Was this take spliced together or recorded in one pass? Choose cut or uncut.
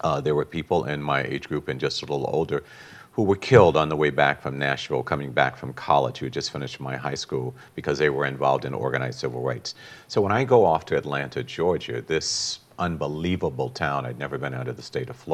uncut